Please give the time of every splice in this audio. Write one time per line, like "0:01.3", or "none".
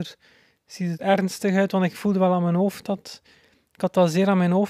0:01.0